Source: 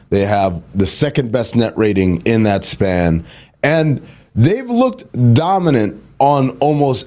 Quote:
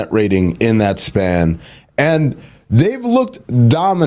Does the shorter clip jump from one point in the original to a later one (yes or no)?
no